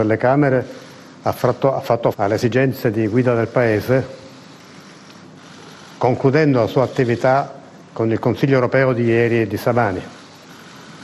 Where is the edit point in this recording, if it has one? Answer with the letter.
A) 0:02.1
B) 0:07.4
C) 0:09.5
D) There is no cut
A